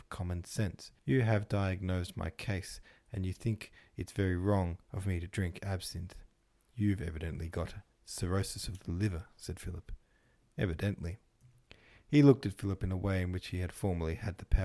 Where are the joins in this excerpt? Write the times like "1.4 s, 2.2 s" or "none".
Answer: 1.0 s